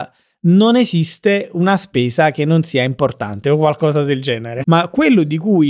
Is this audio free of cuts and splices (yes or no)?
no